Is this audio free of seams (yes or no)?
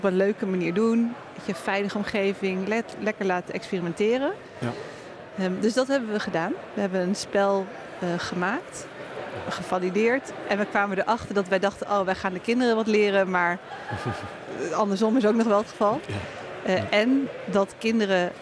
yes